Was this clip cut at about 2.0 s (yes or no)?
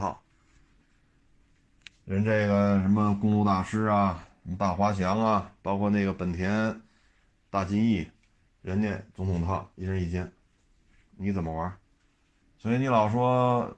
no